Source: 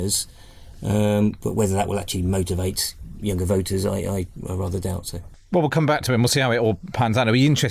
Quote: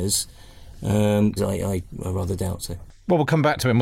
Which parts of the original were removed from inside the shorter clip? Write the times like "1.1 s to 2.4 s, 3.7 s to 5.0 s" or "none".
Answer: 1.4 s to 3.8 s